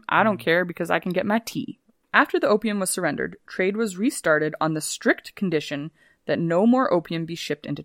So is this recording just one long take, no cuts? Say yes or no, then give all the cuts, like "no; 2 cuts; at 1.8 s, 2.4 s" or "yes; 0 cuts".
no; 1 cut; at 1.9 s